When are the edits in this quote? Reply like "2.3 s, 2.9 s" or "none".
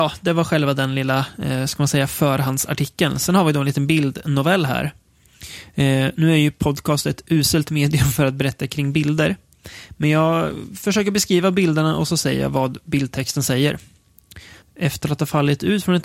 14.6 s

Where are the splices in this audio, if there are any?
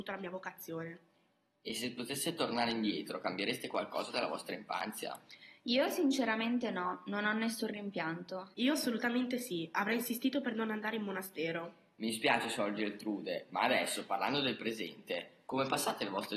none

